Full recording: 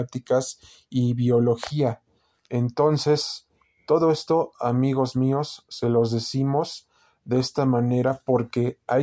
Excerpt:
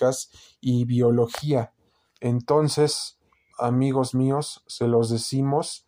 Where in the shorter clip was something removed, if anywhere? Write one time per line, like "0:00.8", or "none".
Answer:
0:03.5